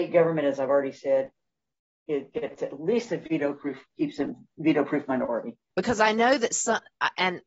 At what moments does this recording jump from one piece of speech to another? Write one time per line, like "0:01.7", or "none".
0:05.7